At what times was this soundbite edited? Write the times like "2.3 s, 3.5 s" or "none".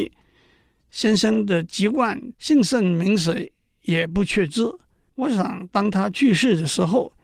2.3 s, 5.1 s